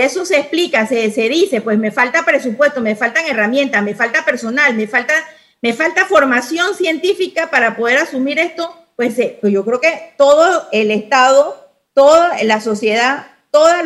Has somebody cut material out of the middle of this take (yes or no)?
no